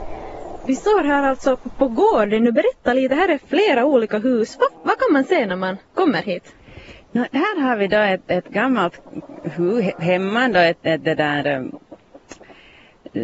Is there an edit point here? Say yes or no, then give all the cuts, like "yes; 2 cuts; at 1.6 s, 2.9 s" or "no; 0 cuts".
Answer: no; 0 cuts